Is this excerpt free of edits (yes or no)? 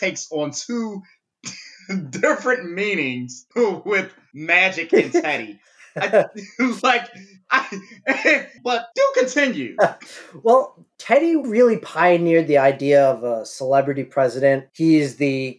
no